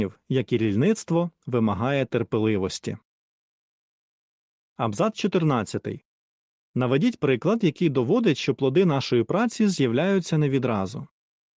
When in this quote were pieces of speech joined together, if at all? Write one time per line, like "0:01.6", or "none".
none